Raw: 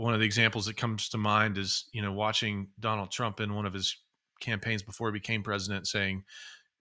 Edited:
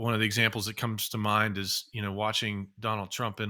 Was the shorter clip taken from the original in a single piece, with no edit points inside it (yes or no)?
yes